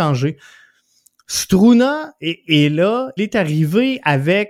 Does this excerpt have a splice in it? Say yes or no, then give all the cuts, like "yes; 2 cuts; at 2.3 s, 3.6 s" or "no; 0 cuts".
yes; 1 cut; at 3.2 s